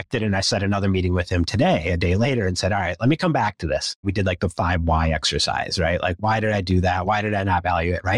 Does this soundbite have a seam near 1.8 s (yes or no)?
no